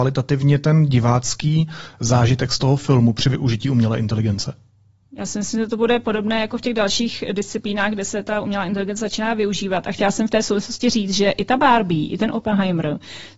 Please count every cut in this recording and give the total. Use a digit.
0